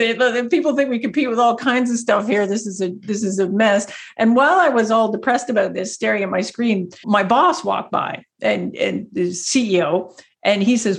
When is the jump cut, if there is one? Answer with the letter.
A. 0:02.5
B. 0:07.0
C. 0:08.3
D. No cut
B